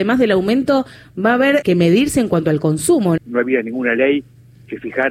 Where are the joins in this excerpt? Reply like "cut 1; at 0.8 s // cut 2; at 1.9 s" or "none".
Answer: cut 1; at 1.6 s // cut 2; at 3.2 s

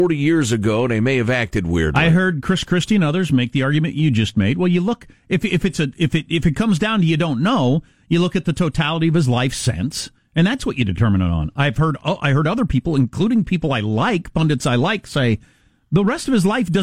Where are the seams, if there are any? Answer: none

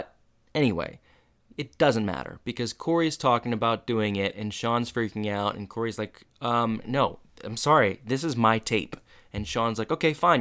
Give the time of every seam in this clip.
none

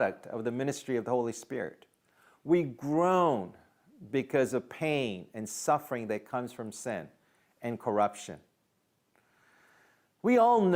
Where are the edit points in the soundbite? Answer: none

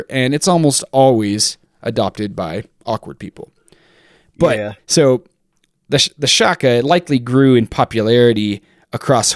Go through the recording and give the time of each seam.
cut 1; at 4.8 s

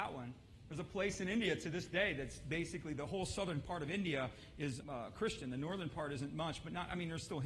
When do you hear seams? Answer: cut 1; at 4.8 s

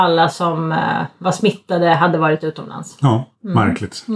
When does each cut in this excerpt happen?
none

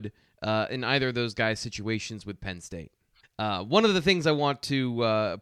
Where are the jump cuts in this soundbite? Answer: cut 1; at 3.2 s

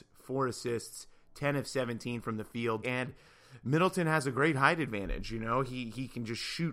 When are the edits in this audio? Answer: cut 1; at 2.8 s

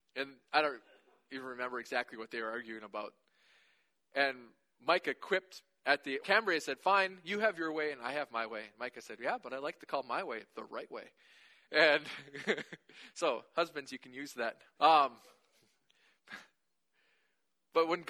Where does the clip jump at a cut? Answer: cut 1; at 6.2 s // cut 2; at 14.8 s

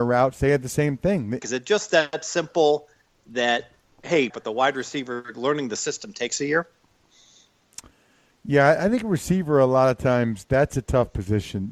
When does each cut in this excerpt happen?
cut 1; at 1.4 s // cut 2; at 4.3 s

